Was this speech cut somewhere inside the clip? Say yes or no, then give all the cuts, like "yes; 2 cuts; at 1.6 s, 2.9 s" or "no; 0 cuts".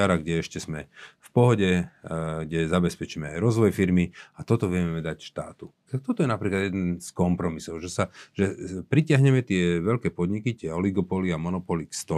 yes; 1 cut; at 5.9 s